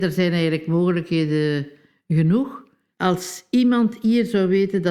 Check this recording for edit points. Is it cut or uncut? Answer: cut